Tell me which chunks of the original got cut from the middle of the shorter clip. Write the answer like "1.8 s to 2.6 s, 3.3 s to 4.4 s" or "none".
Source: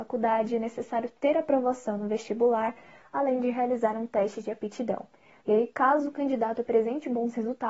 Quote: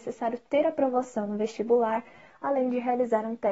none